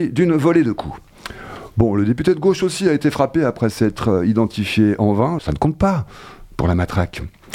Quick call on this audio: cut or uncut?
cut